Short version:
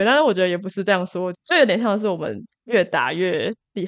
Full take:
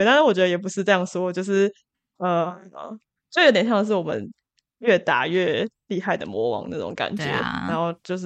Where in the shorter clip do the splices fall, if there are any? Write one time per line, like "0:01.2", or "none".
0:01.3
0:02.5